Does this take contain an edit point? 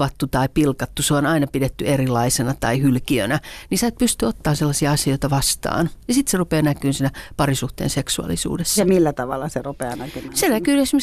no; 0 cuts

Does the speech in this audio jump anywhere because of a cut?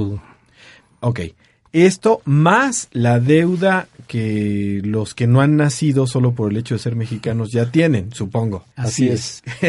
yes; 1 cut; at 8.7 s

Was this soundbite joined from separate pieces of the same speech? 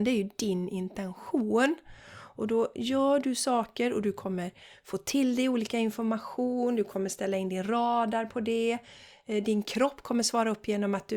no; 0 cuts

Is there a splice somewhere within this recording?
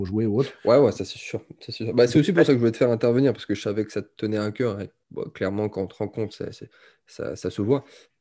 no; 0 cuts

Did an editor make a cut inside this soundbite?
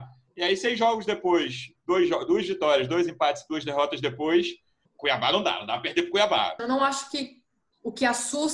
yes; 2 cuts; at 4.9 s, 6.6 s

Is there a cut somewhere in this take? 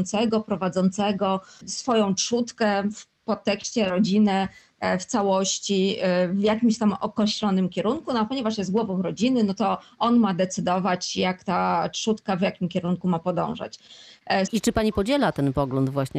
yes; 2 cuts; at 1.6 s, 14.5 s

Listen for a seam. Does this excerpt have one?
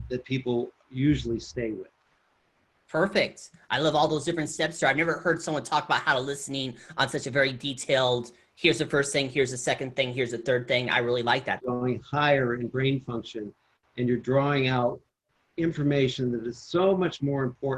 yes; 1 cut; at 11.6 s

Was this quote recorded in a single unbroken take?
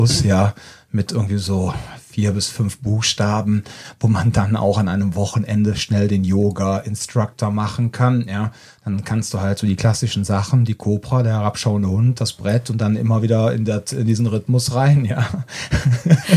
yes; 0 cuts

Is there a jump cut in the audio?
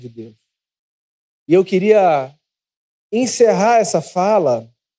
yes; 1 cut; at 1.3 s

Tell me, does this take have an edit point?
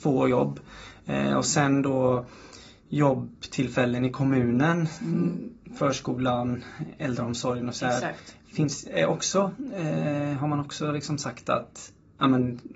no; 0 cuts

